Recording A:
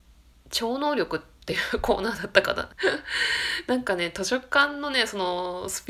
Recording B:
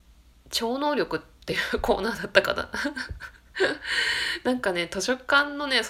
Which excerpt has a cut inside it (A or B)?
A